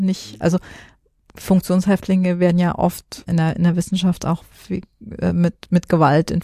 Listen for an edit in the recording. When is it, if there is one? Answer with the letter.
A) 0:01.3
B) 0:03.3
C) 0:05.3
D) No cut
B